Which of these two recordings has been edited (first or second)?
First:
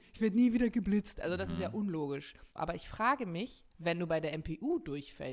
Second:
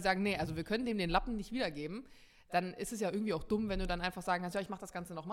first